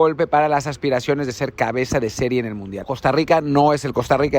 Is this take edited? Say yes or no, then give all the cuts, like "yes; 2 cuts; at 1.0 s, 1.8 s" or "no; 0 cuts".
yes; 1 cut; at 2.8 s